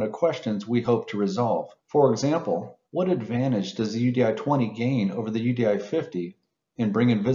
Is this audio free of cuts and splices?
no; 2 cuts; at 1.8 s, 2.9 s

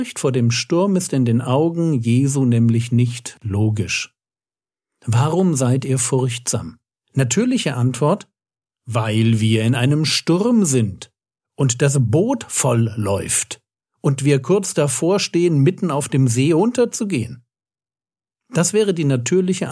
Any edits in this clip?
yes; 1 cut; at 7.0 s

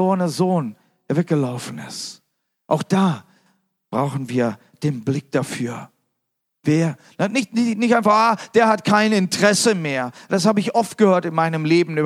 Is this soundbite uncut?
yes; 0 cuts

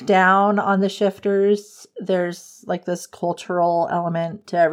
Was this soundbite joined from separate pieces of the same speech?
no; 0 cuts

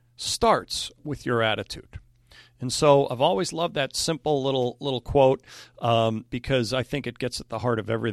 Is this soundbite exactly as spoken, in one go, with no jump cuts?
yes; 0 cuts

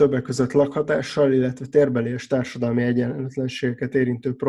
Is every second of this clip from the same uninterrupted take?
yes; 0 cuts

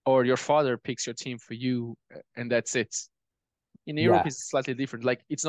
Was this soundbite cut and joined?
no; 0 cuts

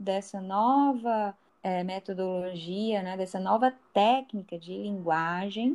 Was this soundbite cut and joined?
no; 0 cuts

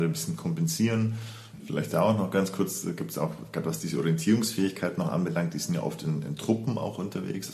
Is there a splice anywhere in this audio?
yes; 1 cut; at 1.6 s

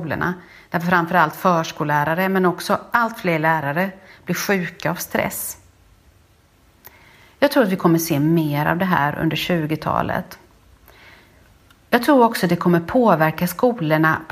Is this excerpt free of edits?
yes; 0 cuts

